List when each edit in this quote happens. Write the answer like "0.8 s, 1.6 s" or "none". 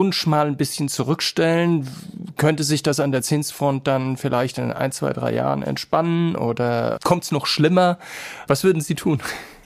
none